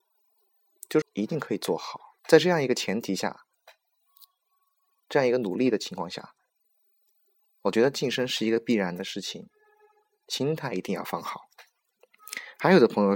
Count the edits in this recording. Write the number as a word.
two